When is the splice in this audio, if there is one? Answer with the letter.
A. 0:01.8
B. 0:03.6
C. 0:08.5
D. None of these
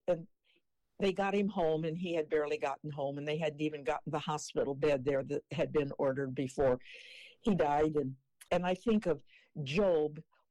C